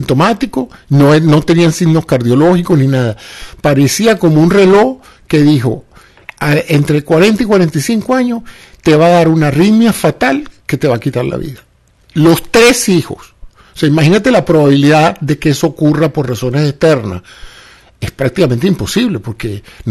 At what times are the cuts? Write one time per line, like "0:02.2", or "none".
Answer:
none